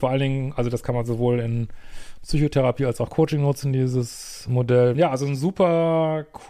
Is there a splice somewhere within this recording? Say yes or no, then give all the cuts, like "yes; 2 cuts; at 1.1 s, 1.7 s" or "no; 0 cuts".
yes; 1 cut; at 4.9 s